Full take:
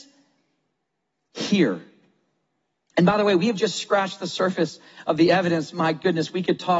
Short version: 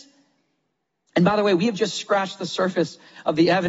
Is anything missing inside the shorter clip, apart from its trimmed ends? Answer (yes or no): yes